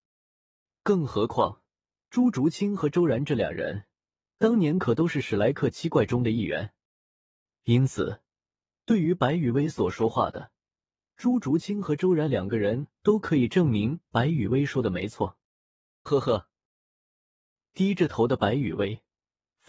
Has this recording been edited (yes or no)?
yes